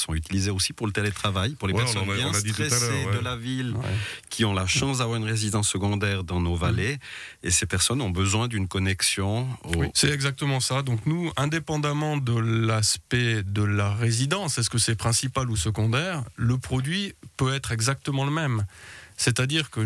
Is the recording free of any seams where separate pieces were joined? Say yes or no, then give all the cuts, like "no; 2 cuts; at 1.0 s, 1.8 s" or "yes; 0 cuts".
no; 1 cut; at 9.9 s